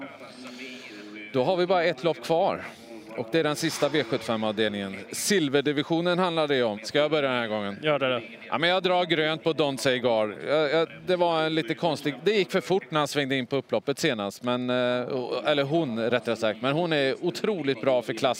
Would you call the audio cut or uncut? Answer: cut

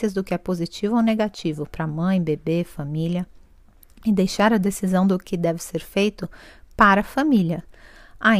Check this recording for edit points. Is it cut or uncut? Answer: uncut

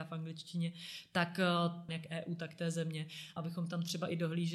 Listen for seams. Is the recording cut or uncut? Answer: cut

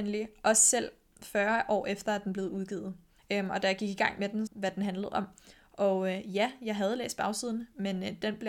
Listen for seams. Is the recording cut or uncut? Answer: cut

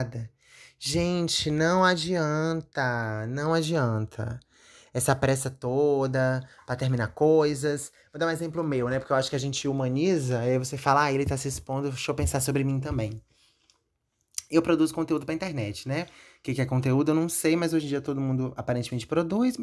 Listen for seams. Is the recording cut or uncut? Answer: uncut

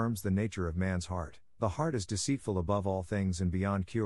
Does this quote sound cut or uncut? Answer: uncut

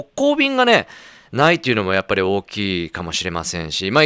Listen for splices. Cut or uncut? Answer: uncut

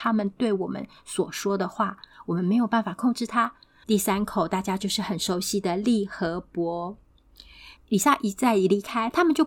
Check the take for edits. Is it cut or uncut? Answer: cut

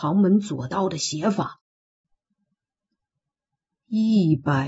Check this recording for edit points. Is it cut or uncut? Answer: cut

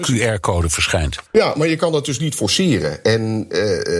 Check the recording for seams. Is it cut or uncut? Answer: cut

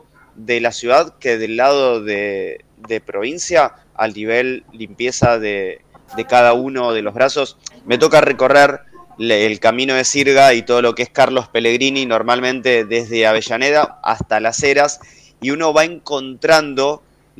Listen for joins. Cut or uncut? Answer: cut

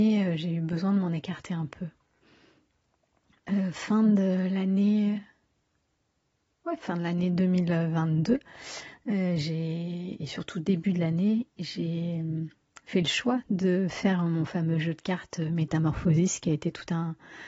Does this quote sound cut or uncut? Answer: uncut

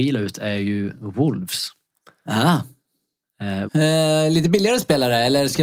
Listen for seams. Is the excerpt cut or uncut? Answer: cut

